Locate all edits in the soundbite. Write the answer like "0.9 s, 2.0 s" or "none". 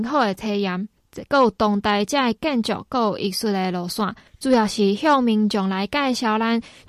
1.0 s, 4.3 s

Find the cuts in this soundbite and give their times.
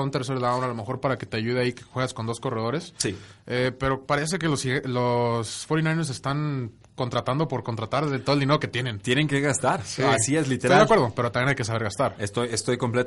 none

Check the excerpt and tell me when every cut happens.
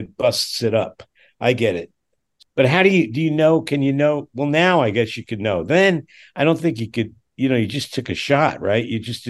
none

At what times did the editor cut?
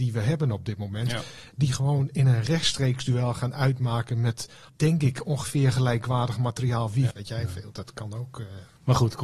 7.1 s

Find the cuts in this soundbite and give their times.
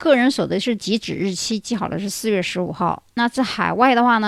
none

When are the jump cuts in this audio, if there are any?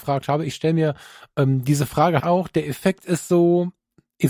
2.2 s

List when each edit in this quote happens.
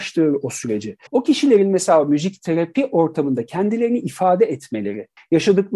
1.1 s

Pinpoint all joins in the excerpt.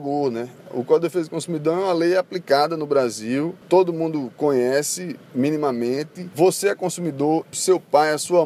6.3 s, 7.4 s

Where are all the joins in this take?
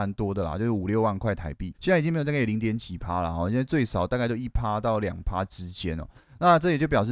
1.7 s

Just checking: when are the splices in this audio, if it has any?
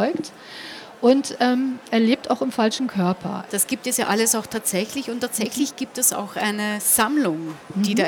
3.5 s

